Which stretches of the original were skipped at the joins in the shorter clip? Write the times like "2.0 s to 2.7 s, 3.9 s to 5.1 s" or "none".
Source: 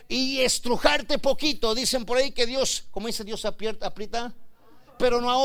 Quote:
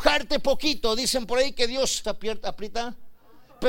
2.8 s to 3.4 s

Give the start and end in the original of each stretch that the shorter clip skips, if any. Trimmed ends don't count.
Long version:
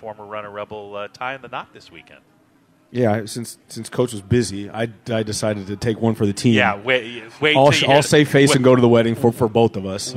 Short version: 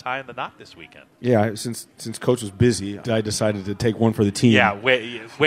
2.3 s to 2.8 s, 4.7 s to 5.0 s

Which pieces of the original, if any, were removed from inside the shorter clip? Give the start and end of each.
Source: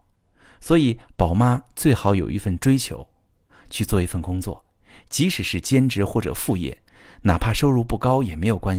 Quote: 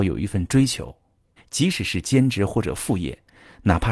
3.5 s to 5.0 s

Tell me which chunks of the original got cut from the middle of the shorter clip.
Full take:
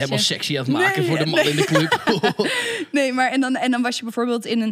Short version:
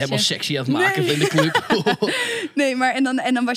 1.1 s to 1.4 s

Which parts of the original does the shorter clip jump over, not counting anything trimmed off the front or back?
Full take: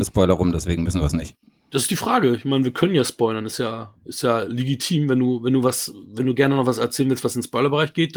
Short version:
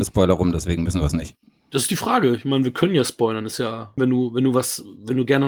4.0 s to 5.1 s

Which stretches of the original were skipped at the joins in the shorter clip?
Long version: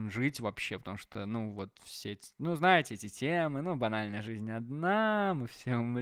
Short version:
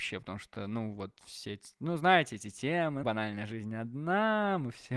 3.6 s to 3.8 s

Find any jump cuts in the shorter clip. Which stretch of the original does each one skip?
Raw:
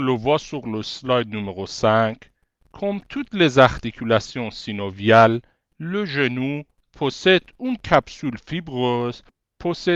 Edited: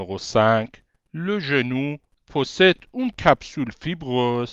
2.4 s to 5.6 s

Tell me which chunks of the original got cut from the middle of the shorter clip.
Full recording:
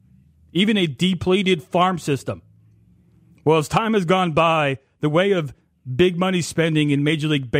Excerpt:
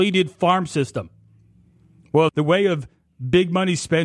3.6 s to 4.9 s

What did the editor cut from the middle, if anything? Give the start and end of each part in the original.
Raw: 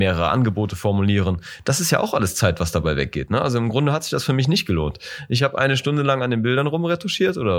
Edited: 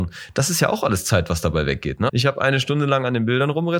3.4 s to 5.3 s

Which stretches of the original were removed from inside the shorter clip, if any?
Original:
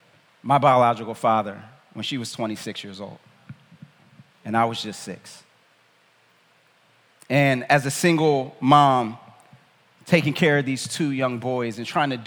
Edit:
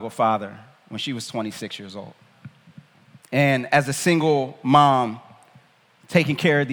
4.2 s to 7.2 s

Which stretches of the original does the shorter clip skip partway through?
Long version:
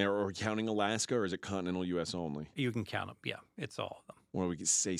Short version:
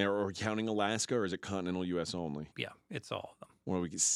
2.5 s to 3.2 s

